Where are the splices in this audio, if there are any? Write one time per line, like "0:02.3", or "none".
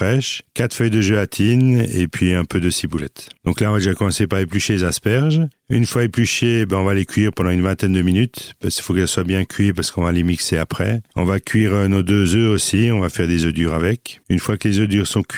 none